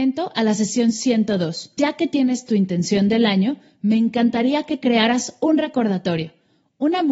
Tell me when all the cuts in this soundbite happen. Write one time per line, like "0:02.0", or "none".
0:01.8